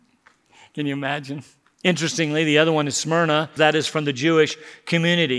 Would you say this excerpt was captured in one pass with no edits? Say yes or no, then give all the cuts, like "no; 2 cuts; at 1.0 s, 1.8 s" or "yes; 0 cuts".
no; 2 cuts; at 1.7 s, 3.6 s